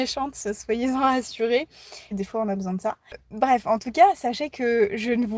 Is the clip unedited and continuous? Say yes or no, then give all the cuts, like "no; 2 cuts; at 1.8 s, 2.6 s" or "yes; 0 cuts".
no; 1 cut; at 2.1 s